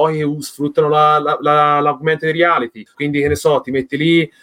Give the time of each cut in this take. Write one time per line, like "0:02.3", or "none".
0:02.9